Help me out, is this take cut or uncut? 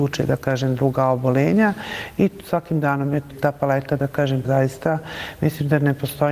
cut